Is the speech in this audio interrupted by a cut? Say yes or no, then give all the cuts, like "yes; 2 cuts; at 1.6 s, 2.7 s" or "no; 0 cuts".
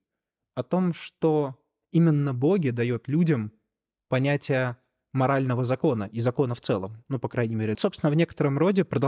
yes; 1 cut; at 7.7 s